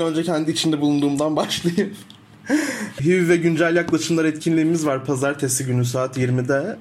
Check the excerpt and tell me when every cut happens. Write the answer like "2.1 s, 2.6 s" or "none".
3.0 s